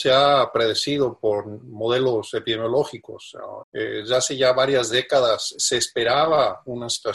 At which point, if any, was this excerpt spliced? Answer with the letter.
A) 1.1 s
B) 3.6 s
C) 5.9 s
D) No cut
B